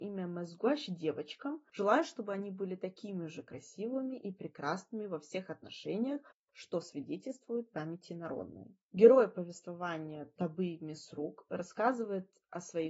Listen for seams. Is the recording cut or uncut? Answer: cut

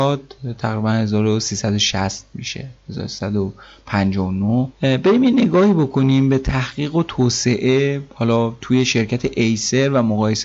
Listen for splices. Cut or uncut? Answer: cut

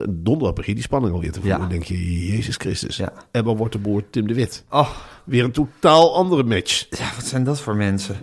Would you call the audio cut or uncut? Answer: uncut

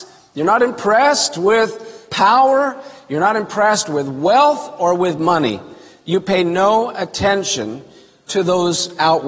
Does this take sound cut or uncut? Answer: uncut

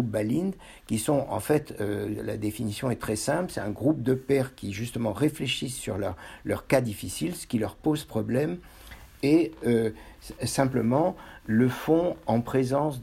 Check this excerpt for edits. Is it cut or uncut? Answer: uncut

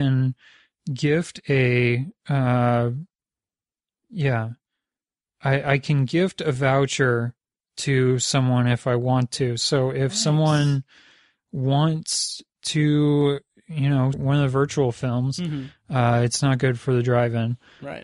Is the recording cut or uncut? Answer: cut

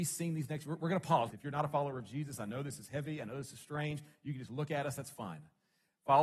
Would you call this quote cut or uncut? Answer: cut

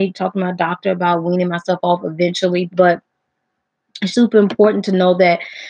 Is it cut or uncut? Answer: cut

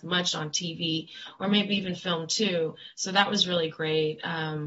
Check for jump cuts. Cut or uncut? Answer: uncut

